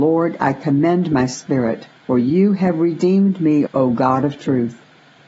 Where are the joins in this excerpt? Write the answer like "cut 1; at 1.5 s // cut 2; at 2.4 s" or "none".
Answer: cut 1; at 2.0 s // cut 2; at 3.7 s